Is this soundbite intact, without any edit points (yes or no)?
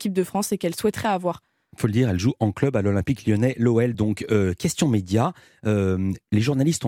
yes